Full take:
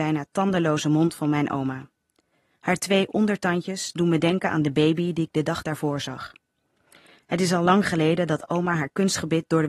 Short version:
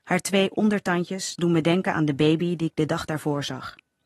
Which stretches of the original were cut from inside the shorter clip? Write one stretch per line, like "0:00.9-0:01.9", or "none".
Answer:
none